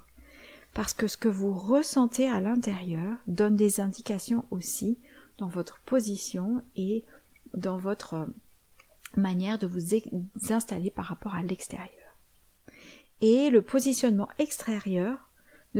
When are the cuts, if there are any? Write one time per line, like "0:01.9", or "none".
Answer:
none